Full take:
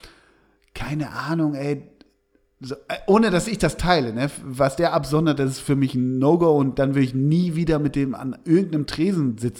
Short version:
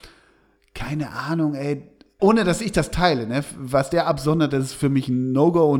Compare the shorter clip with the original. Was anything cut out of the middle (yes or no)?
yes